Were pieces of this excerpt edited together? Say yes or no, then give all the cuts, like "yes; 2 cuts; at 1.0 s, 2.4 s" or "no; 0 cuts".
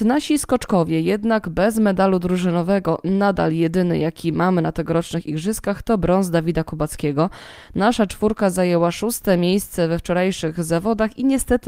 no; 0 cuts